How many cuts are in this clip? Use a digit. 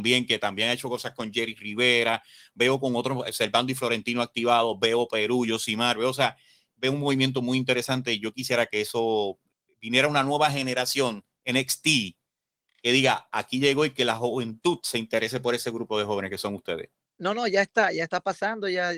0